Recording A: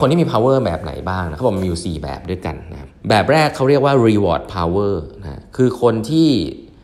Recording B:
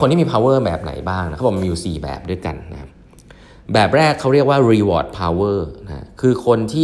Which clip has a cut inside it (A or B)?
A